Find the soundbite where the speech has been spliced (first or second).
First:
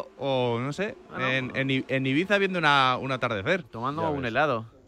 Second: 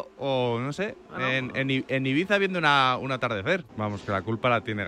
second